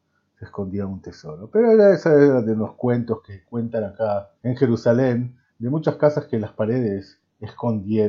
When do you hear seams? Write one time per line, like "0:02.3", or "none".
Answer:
0:04.4
0:05.5